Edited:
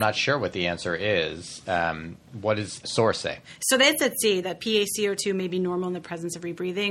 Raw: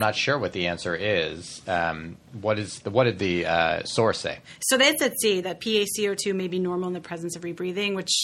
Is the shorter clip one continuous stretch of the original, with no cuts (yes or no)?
no